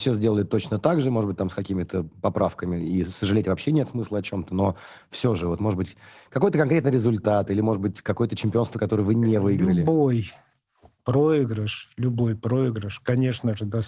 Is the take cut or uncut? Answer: uncut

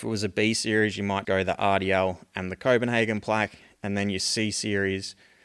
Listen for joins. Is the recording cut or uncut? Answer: cut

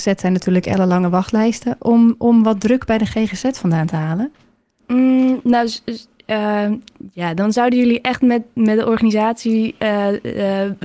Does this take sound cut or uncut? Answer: uncut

